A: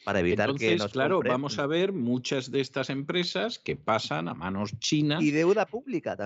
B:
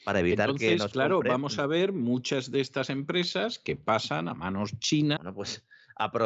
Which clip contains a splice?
B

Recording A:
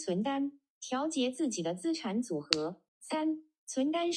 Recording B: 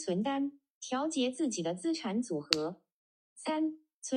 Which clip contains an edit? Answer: A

